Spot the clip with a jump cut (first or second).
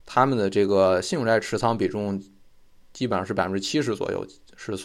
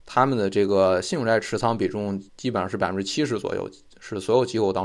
second